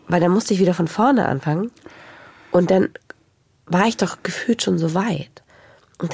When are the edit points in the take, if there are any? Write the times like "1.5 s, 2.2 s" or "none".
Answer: none